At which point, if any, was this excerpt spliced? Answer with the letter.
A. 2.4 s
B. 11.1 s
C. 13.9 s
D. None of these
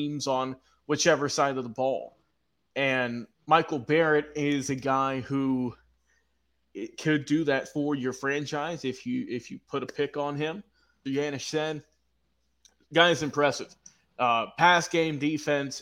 B